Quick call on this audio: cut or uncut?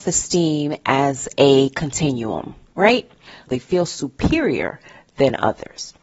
cut